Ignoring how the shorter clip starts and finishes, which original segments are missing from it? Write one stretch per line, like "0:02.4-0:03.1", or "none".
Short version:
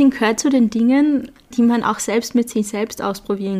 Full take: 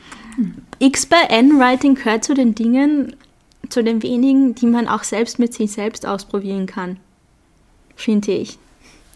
0:03.4-0:04.5